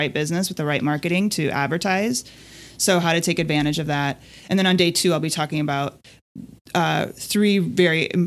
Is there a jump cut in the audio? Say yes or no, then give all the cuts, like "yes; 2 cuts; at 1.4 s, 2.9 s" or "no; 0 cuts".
no; 0 cuts